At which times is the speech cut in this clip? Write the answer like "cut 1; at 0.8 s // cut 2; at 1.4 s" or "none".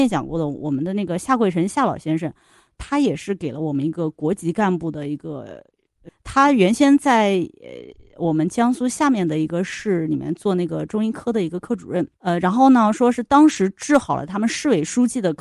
cut 1; at 6.1 s // cut 2; at 12.1 s